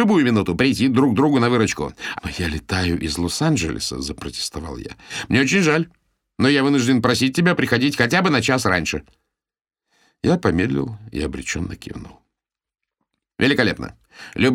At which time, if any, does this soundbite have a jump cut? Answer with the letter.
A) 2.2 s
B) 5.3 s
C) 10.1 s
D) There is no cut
A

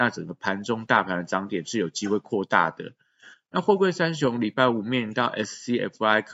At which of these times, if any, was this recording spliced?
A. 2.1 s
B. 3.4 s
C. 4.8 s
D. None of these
D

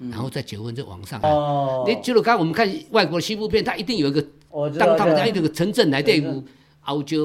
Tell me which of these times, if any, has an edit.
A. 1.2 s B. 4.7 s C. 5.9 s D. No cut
A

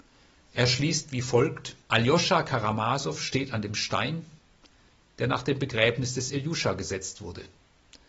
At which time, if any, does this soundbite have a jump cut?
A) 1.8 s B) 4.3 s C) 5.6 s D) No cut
A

